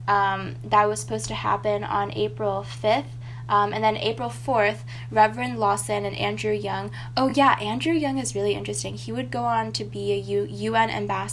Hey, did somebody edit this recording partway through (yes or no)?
no